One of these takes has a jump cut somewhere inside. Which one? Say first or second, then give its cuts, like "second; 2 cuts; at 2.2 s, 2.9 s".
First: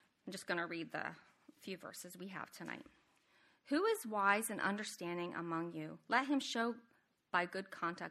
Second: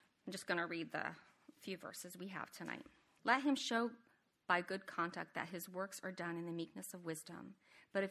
second; 1 cut; at 3.2 s